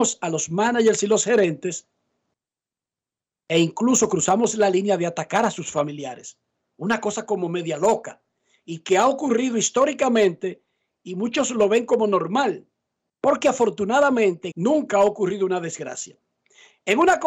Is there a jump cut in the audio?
yes; 1 cut; at 14.5 s

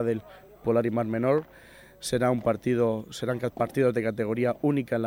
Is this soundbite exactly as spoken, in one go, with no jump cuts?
yes; 0 cuts

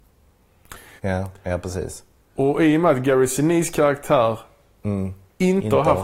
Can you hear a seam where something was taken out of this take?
yes; 1 cut; at 1.0 s

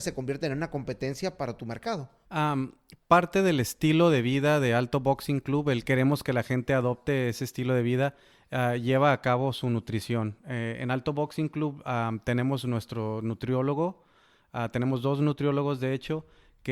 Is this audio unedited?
no; 1 cut; at 2.3 s

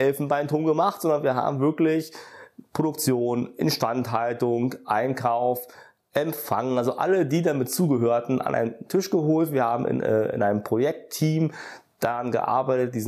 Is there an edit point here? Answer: no; 0 cuts

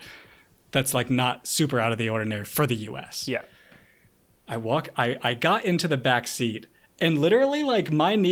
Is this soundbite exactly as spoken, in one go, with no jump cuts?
yes; 0 cuts

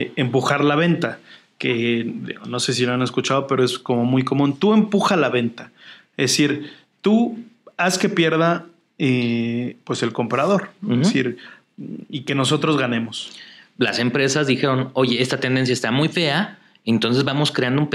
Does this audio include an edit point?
no; 0 cuts

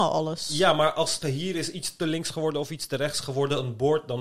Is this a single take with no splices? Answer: no; 1 cut; at 1.2 s

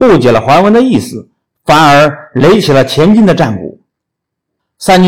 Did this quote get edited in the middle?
no; 0 cuts

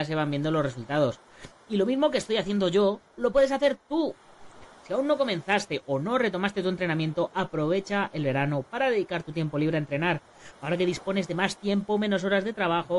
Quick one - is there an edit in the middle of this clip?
no; 0 cuts

